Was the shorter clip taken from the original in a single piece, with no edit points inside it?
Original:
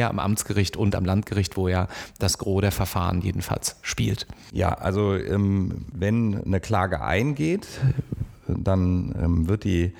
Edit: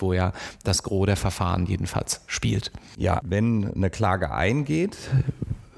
no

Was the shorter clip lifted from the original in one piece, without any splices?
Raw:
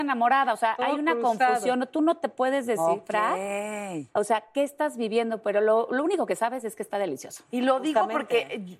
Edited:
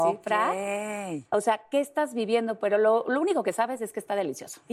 yes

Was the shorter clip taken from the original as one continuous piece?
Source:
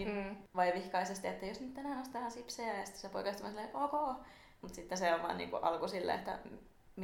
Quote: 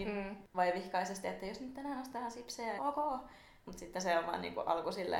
no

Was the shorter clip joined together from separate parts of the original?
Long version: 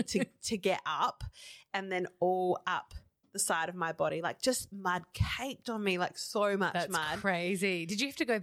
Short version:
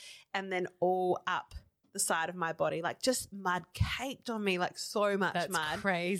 no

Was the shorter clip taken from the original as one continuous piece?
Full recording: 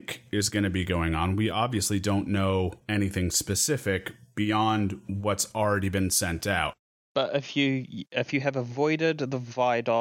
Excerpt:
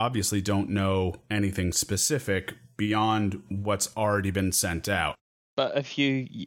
yes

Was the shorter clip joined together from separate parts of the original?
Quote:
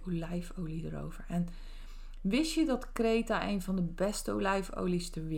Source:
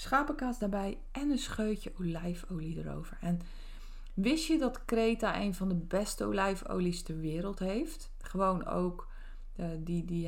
no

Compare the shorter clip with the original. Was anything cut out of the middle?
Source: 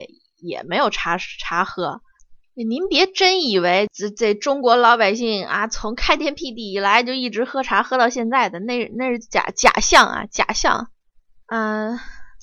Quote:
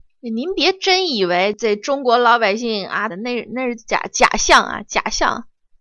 yes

